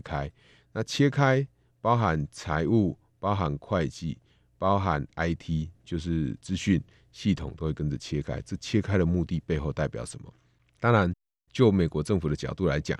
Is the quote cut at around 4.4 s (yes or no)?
no